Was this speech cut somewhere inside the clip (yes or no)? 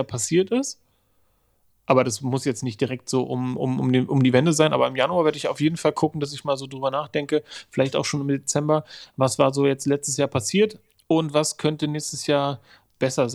no